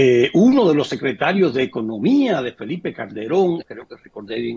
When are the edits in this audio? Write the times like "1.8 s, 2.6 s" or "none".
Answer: 3.6 s